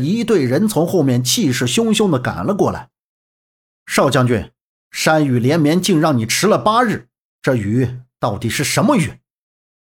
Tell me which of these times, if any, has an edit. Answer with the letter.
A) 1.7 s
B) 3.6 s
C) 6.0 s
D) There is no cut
D